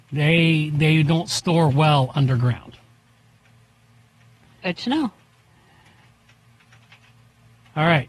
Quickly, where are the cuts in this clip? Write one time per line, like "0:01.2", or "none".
none

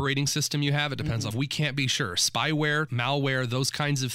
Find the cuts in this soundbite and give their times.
0:01.3
0:02.9

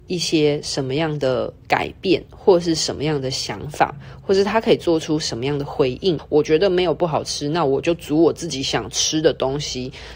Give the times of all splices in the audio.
0:01.6
0:06.2

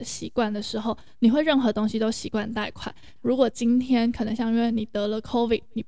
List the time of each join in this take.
0:03.2

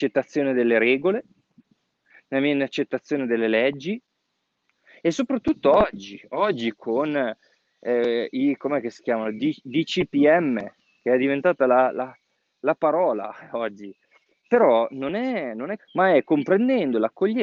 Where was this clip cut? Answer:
0:14.4
0:15.8

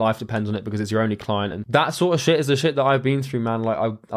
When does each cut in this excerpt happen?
none

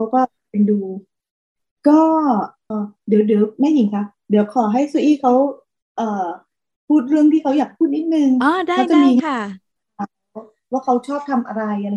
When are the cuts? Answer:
0:02.7

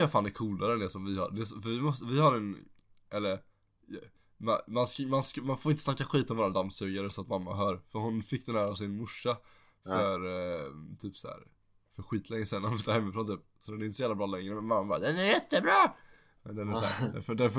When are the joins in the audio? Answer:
none

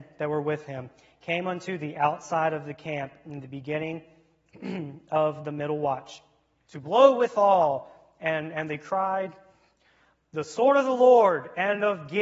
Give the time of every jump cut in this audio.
0:06.6

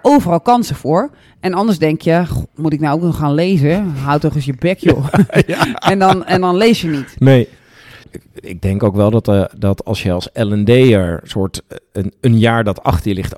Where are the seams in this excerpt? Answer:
0:08.0

